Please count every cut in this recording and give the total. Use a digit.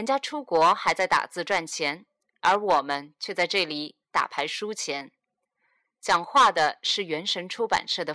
0